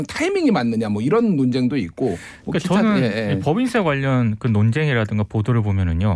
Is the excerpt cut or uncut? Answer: uncut